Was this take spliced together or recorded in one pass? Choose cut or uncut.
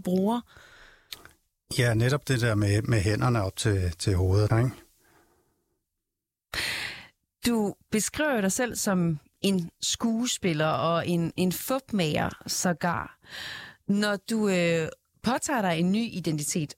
cut